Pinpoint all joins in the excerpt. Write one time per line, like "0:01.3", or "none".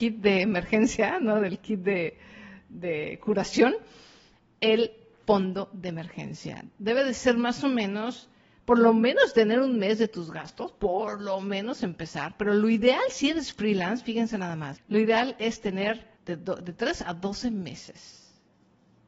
0:14.7
0:16.2